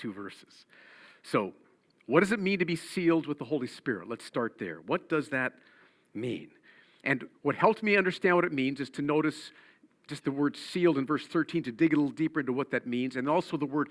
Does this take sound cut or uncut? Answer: uncut